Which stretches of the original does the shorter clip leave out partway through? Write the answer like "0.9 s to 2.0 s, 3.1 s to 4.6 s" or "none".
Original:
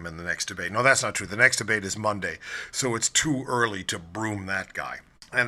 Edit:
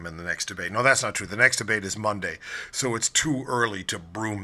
none